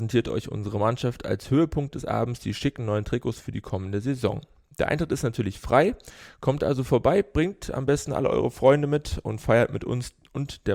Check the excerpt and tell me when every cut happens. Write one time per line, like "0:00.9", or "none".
none